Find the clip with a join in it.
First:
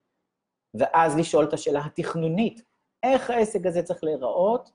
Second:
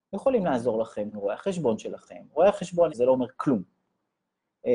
second; 2 cuts; at 1.1 s, 2.9 s

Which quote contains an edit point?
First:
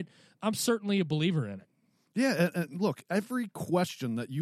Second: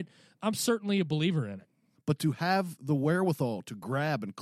second; 1 cut; at 2.0 s

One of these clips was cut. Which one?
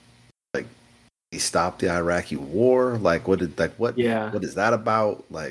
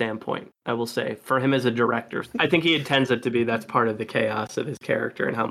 second; 1 cut; at 2.2 s

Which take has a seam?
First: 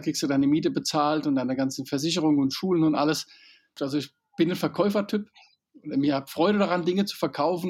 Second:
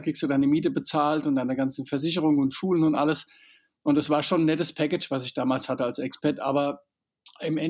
first; 1 cut; at 3.8 s

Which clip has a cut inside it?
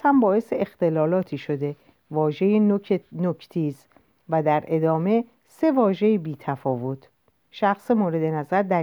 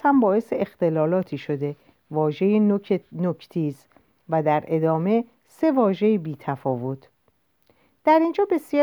first; 1 cut; at 7.4 s

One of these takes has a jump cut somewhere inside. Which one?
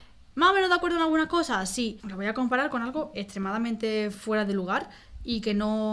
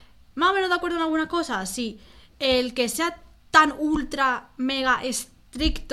first; 2 cuts; at 2.0 s, 3.1 s

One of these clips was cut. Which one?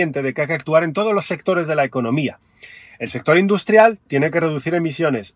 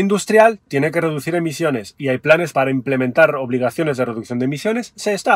second; 1 cut; at 2.5 s

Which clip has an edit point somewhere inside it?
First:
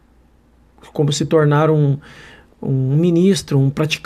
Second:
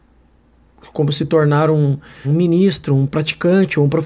second; 1 cut; at 2.2 s

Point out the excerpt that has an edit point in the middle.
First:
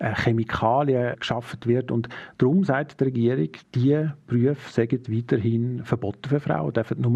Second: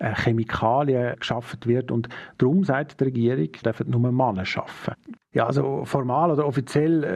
second; 2 cuts; at 3.6 s, 5.2 s

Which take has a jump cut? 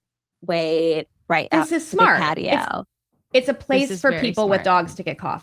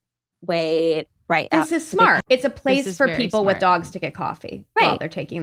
second; 1 cut; at 2.2 s

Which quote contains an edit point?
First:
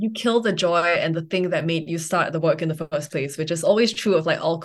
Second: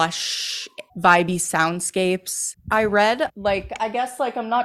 second; 1 cut; at 2.5 s

